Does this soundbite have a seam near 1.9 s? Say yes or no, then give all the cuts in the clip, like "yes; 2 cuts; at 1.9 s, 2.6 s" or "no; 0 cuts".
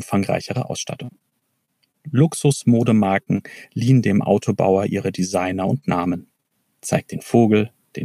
no; 1 cut; at 6.6 s